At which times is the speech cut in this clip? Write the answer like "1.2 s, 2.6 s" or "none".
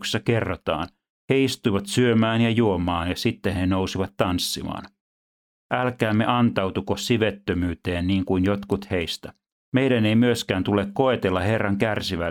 9.5 s